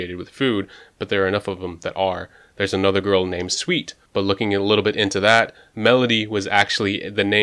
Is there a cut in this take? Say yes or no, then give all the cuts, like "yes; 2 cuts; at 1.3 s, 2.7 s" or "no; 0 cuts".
yes; 1 cut; at 4.1 s